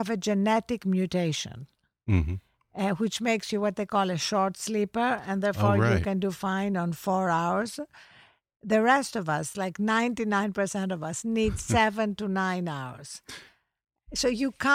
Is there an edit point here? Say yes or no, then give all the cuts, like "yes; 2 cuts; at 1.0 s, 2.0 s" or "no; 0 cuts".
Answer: yes; 1 cut; at 9.5 s